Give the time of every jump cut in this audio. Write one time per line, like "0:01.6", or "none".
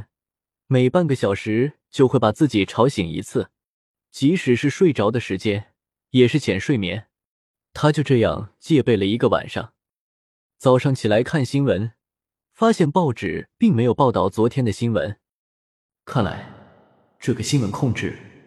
none